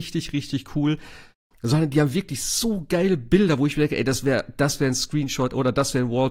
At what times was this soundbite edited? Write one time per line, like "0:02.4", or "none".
0:01.5